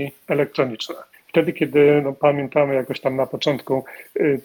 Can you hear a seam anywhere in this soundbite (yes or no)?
yes